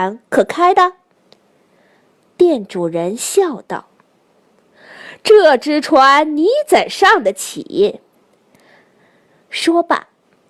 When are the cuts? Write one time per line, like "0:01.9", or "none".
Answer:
0:09.0